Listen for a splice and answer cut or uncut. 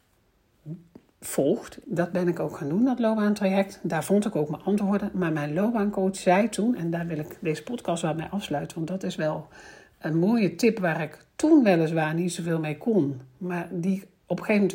cut